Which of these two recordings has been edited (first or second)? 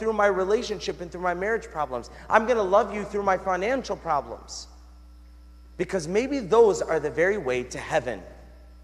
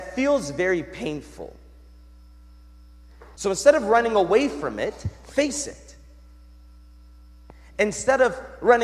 second